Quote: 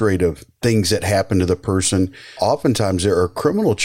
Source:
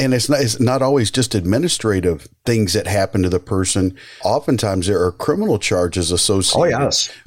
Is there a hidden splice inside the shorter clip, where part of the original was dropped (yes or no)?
no